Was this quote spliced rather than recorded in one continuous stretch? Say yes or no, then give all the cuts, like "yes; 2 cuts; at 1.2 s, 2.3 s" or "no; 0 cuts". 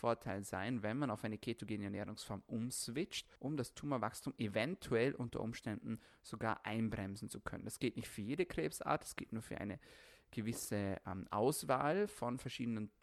yes; 1 cut; at 3.4 s